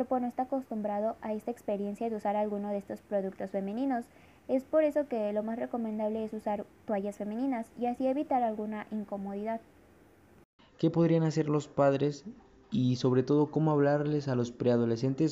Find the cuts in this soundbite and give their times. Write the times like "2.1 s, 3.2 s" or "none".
10.6 s